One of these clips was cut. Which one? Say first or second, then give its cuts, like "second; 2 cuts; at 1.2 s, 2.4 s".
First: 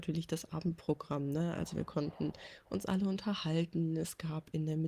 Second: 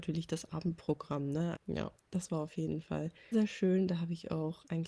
second; 2 cuts; at 1.5 s, 3.3 s